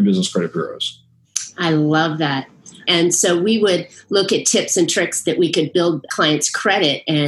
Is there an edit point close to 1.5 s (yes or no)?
no